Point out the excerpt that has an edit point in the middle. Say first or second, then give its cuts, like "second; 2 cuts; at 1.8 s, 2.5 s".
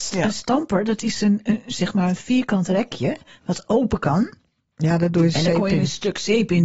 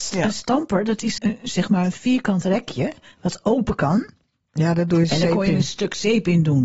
second; 1 cut; at 1.2 s